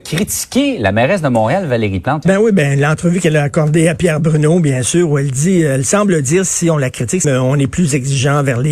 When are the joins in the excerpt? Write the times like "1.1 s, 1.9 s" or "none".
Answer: 2.2 s, 7.2 s